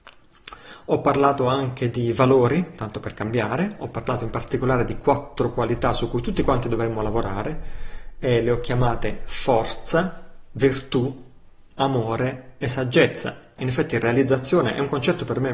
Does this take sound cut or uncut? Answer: cut